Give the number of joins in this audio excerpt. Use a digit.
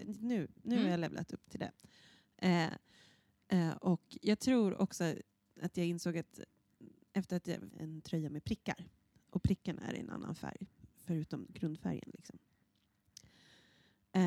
1